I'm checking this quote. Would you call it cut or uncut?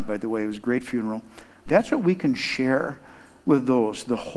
cut